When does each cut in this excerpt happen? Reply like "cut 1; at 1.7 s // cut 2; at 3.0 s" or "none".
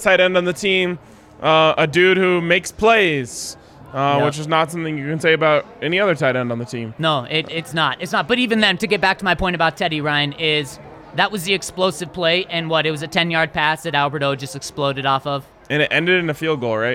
none